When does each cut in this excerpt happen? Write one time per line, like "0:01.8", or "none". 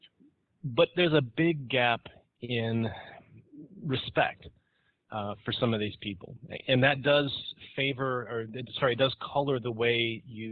none